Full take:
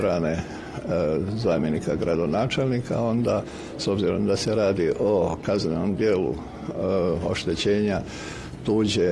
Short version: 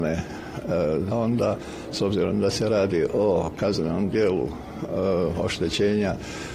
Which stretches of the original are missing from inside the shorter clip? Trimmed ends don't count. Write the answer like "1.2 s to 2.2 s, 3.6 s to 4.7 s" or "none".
1.3 s to 3.0 s